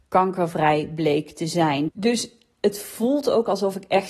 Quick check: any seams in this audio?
yes; 1 cut; at 1.9 s

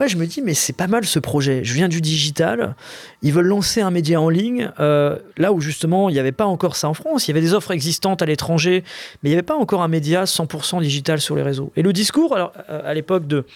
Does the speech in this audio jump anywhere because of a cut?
no; 0 cuts

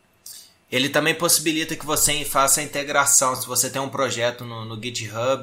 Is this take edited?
no; 0 cuts

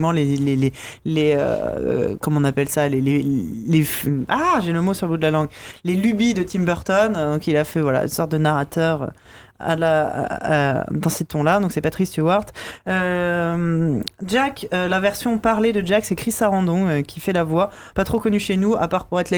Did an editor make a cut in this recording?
no; 0 cuts

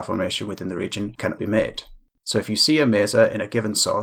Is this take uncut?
no; 1 cut; at 2.2 s

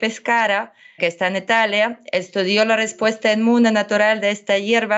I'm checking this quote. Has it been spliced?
yes; 1 cut; at 1.0 s

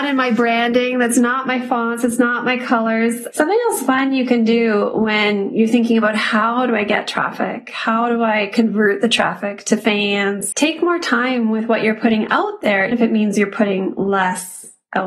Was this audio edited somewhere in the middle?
yes; 3 cuts; at 3.3 s, 10.5 s, 12.9 s

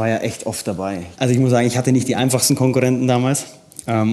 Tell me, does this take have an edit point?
yes; 1 cut; at 1.1 s

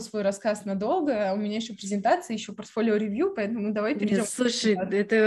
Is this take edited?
no; 0 cuts

